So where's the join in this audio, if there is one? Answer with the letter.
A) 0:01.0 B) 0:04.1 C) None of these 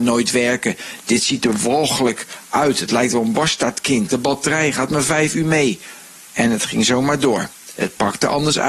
B